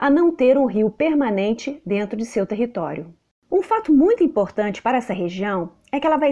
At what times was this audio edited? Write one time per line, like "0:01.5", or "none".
none